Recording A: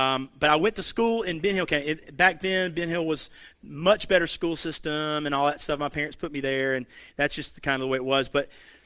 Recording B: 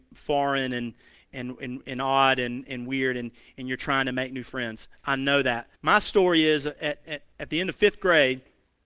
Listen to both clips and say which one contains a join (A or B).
B